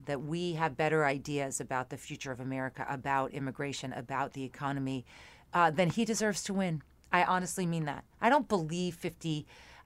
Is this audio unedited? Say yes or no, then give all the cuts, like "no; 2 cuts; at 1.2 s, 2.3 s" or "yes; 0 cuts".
yes; 0 cuts